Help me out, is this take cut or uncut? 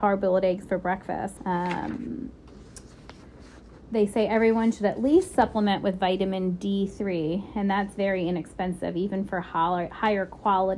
cut